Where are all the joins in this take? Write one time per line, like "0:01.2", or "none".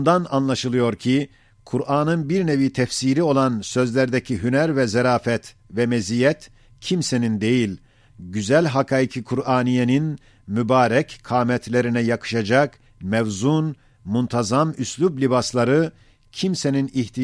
0:08.1